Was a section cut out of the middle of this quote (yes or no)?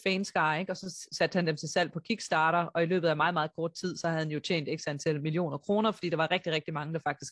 no